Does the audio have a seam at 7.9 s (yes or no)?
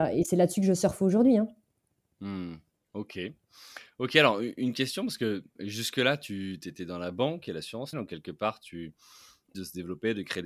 yes